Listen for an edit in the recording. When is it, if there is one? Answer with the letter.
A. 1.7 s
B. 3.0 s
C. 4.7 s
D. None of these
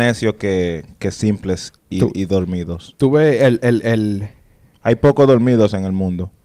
A